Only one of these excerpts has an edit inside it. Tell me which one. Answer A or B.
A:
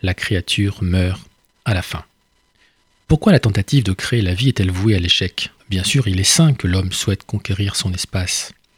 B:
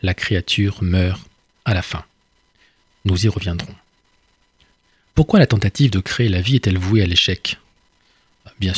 A